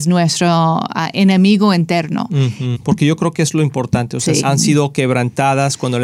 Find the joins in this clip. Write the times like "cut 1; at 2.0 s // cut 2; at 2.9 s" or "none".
cut 1; at 2.7 s // cut 2; at 4.4 s